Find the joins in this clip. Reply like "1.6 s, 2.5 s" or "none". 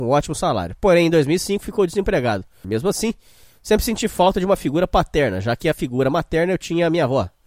2.6 s